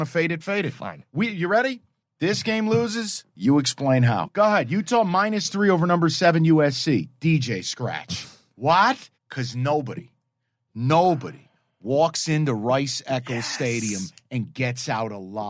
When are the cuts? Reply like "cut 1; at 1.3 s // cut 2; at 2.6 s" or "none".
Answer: cut 1; at 9.2 s